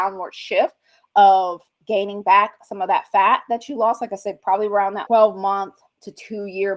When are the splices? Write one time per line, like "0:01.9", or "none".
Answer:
0:05.1

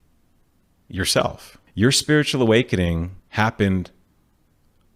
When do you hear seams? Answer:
0:01.7
0:03.2

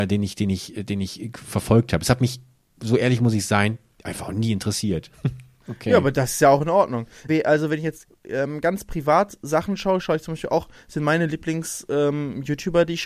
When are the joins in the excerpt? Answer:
0:07.3

